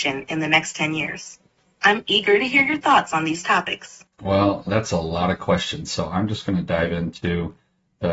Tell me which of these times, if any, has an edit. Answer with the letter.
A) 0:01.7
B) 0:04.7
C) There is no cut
B